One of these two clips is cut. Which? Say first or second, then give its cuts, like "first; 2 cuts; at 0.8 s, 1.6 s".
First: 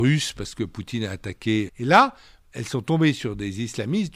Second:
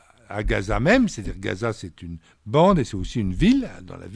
first; 1 cut; at 1.7 s